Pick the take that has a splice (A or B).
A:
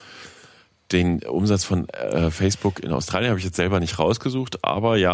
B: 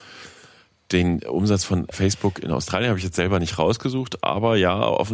B